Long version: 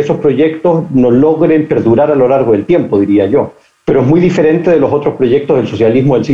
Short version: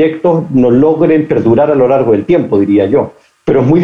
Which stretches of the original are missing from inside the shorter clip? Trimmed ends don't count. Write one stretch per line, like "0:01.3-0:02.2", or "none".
none